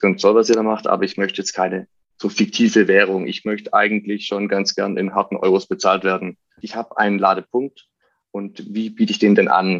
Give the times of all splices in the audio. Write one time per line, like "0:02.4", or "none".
0:06.6